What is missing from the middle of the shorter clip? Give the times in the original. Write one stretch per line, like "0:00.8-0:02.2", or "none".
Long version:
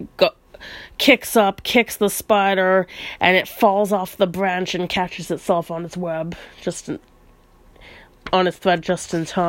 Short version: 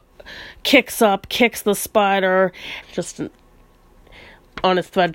0:03.2-0:06.5